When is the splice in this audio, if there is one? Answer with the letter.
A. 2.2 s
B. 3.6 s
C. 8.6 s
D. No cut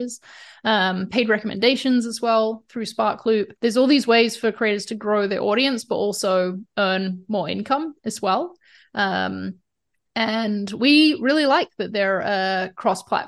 B